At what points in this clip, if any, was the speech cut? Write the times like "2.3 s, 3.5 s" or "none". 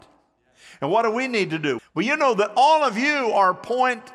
1.8 s

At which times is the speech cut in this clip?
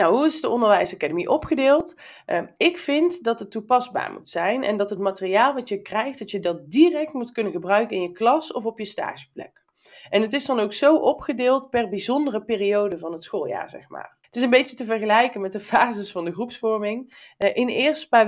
14.2 s

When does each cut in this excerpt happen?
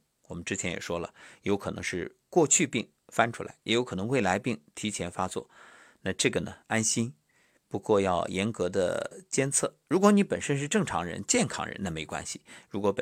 none

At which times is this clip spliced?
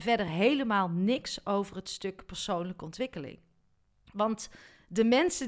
4.1 s

